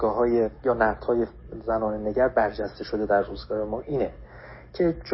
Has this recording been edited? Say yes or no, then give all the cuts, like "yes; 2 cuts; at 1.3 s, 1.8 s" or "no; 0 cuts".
no; 0 cuts